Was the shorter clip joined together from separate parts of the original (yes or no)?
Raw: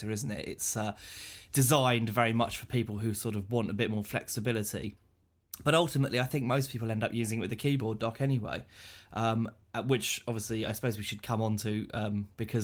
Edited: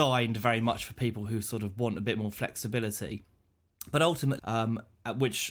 yes